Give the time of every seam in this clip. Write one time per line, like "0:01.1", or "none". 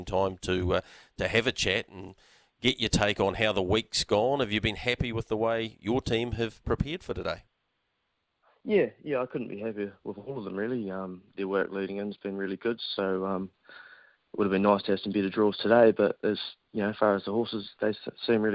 none